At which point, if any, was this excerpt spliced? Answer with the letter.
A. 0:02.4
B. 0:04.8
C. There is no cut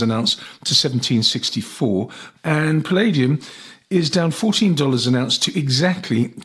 A